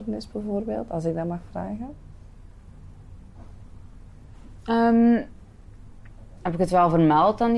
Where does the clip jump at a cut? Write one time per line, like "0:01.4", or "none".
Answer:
0:06.4